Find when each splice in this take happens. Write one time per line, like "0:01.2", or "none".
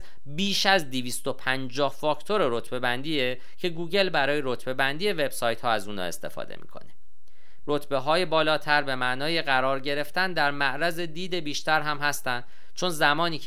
0:07.6